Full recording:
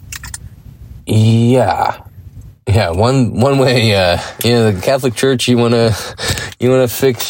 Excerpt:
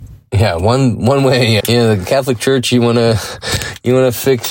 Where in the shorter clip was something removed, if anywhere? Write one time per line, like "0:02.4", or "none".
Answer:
0:01.6